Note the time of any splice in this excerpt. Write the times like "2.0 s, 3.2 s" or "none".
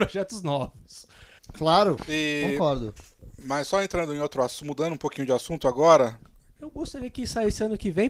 1.4 s, 6.6 s